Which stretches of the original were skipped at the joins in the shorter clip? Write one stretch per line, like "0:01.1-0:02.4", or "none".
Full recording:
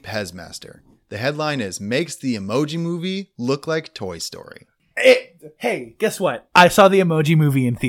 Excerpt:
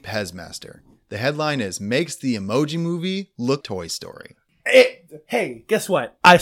0:03.6-0:03.9

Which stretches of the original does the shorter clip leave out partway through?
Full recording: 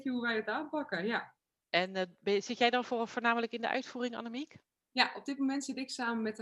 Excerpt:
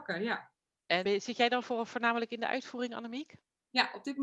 0:01.9-0:02.3

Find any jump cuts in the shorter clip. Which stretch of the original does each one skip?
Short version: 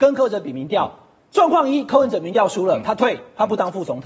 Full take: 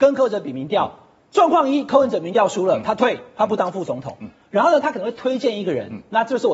none

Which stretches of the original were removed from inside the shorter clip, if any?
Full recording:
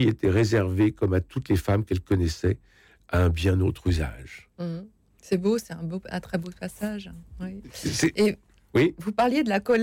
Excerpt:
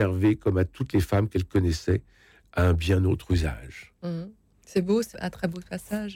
0:05.7-0:06.0

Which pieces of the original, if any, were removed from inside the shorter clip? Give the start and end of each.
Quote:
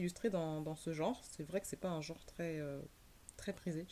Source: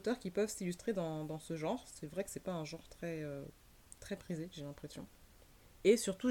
none

